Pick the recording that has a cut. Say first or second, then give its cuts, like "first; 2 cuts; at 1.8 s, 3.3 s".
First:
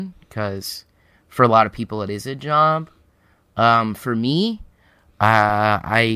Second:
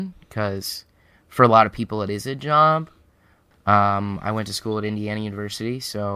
second; 1 cut; at 3.5 s